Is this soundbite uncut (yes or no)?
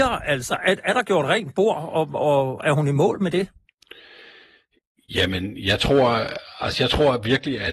yes